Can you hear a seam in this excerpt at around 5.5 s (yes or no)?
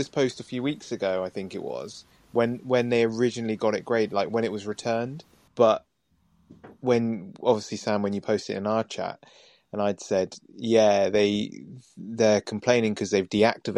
yes